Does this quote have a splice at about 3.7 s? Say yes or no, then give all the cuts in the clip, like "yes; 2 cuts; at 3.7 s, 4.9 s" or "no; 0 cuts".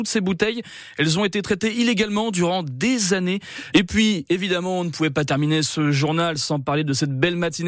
yes; 1 cut; at 3.7 s